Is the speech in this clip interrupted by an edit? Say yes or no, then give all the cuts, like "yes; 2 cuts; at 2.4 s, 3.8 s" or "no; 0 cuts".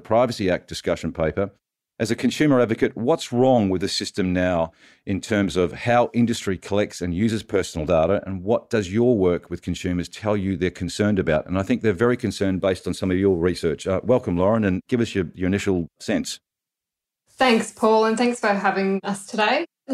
no; 0 cuts